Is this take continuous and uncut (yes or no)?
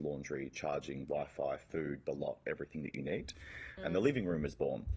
no